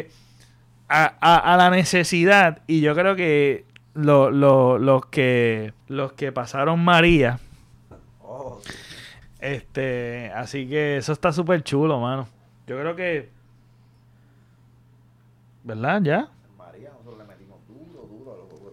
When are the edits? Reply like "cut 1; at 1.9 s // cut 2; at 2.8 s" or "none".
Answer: cut 1; at 5.8 s // cut 2; at 9.2 s